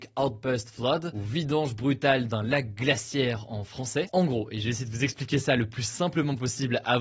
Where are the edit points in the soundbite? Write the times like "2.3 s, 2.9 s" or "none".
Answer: 4.1 s

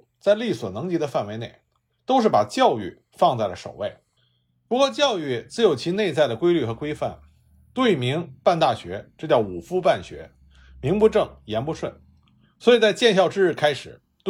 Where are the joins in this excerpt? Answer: none

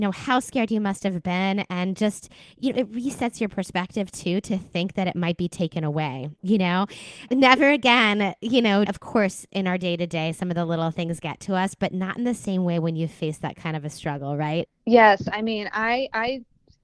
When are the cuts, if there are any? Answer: 7.3 s, 8.9 s, 14.7 s

